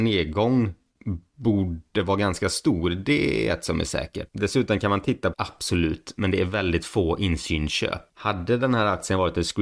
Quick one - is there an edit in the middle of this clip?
yes; 3 cuts; at 4.3 s, 5.3 s, 8.1 s

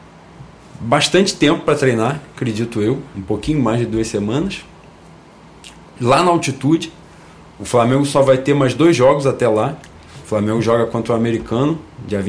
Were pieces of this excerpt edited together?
yes; 1 cut; at 3.1 s

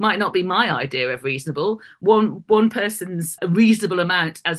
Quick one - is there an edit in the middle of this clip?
yes; 1 cut; at 3.4 s

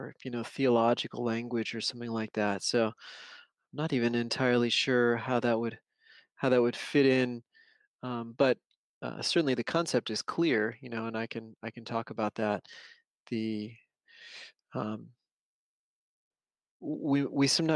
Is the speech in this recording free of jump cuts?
yes; 0 cuts

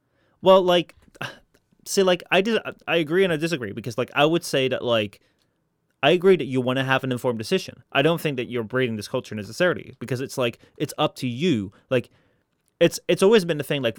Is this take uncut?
no; 1 cut; at 2.8 s

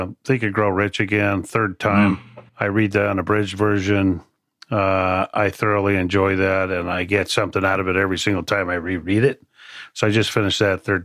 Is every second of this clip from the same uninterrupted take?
no; 1 cut; at 2.5 s

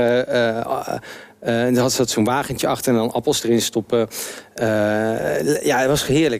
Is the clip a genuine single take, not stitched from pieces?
yes; 0 cuts

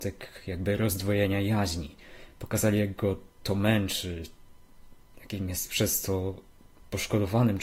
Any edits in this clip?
no; 0 cuts

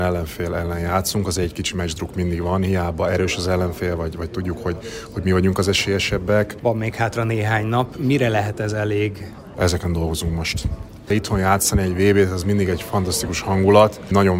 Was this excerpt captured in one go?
no; 3 cuts; at 6.6 s, 9.5 s, 11.1 s

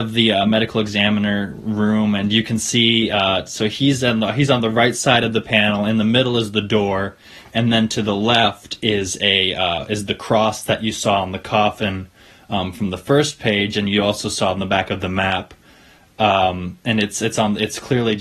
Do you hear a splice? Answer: no; 0 cuts

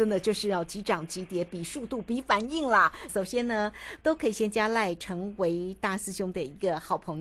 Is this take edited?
yes; 1 cut; at 3.1 s

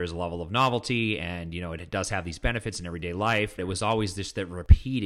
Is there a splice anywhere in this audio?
yes; 1 cut; at 3.6 s

